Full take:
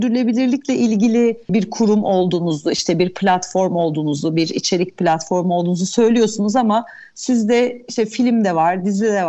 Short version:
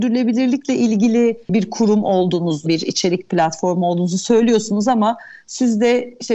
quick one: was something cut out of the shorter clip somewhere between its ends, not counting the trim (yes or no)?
yes